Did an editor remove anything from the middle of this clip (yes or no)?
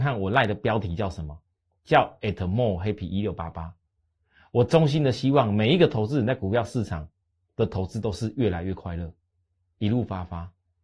no